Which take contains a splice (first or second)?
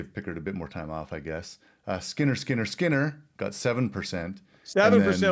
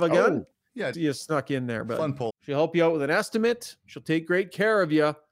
second